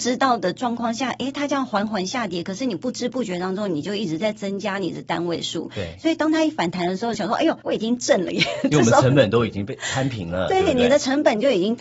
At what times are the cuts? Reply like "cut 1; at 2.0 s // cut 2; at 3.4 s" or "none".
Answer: cut 1; at 7.1 s

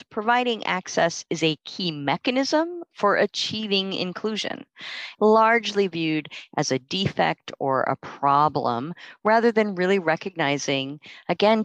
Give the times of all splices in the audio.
cut 1; at 5.1 s

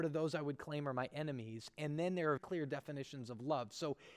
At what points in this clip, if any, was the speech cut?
cut 1; at 2.4 s

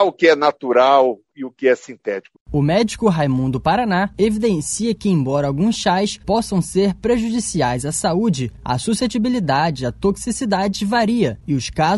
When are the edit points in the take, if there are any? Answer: cut 1; at 2.3 s

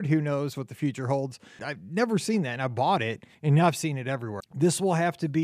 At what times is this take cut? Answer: cut 1; at 1.6 s // cut 2; at 3.3 s // cut 3; at 4.4 s

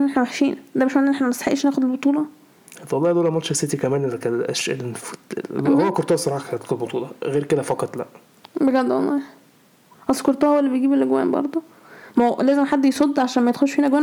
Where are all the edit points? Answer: none

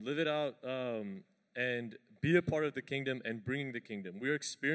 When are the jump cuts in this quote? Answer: none

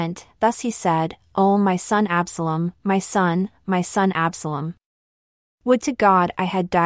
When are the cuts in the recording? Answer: none

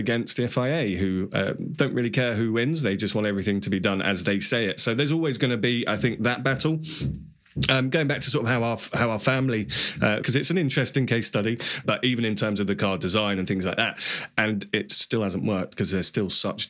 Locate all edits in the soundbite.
cut 1; at 10.2 s // cut 2; at 11.8 s

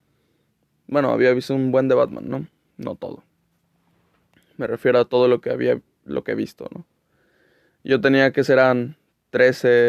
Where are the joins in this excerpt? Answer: none

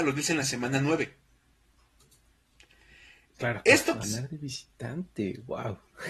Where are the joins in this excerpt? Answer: cut 1; at 4.0 s

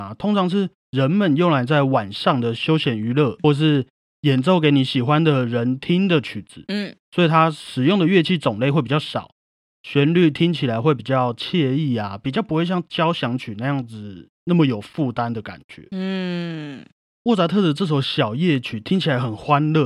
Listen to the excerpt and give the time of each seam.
cut 1; at 3.4 s

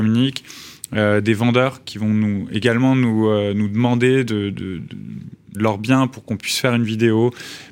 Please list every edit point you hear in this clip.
cut 1; at 4.5 s // cut 2; at 5.5 s

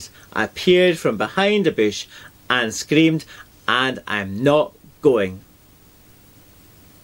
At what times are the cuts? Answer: cut 1; at 3.5 s

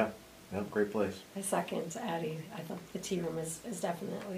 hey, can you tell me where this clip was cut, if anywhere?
cut 1; at 1.2 s

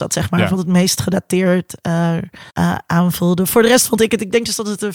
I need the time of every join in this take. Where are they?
cut 1; at 2.5 s

